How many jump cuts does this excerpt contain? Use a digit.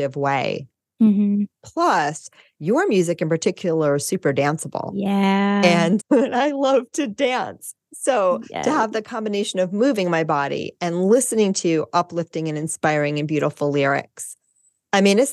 2